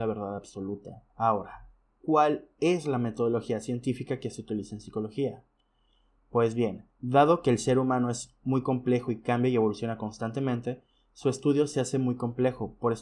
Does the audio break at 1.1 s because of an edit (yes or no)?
yes